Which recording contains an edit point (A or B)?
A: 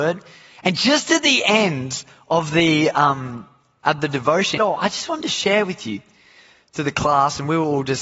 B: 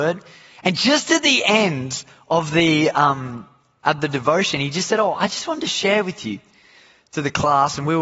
A